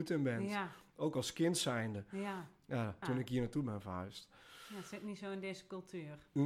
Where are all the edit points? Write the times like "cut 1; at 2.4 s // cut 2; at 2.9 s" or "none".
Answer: cut 1; at 3.0 s